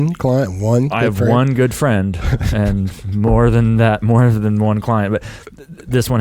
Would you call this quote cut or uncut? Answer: uncut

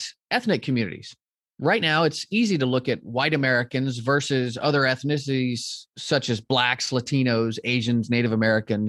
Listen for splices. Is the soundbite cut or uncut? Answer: uncut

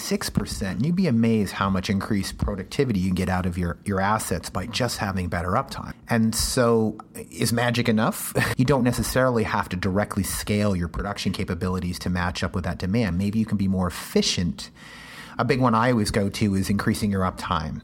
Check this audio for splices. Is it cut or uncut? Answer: cut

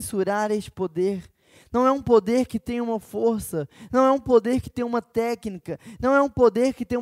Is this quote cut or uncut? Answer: uncut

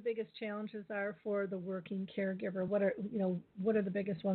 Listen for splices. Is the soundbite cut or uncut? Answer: uncut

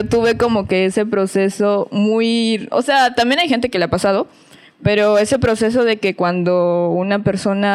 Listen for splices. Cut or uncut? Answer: uncut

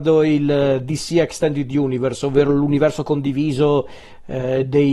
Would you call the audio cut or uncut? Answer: uncut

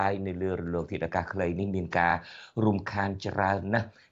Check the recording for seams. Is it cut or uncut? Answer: uncut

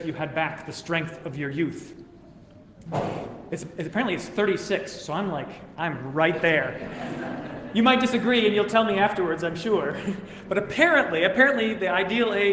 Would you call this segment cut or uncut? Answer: cut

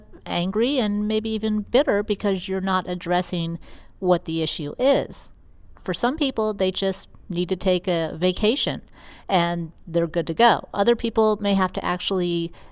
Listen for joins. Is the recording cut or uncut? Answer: cut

